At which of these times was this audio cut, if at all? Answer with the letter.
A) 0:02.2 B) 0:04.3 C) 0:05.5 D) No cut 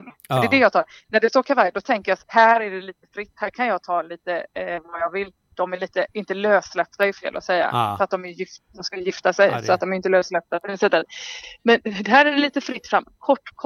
A